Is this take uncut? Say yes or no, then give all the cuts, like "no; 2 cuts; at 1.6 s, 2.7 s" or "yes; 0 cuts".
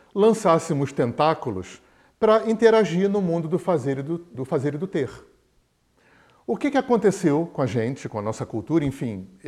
no; 1 cut; at 4.3 s